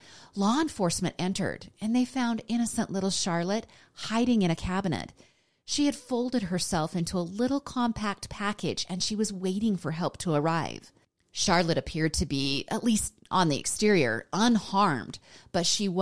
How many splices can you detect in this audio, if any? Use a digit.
0